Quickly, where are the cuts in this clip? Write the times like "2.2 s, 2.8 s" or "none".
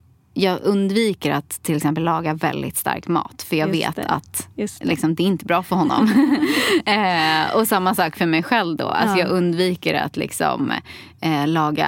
none